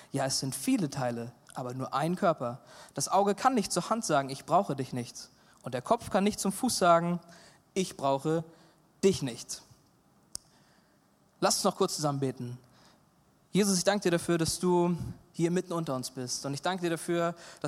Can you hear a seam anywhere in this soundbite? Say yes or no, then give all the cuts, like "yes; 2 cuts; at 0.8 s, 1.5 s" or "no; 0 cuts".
no; 0 cuts